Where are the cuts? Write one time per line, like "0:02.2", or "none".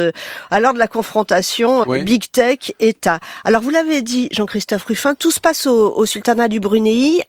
0:01.8